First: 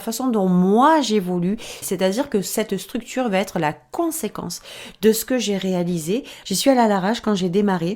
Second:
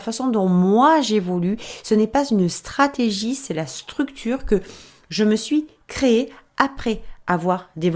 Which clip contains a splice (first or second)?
first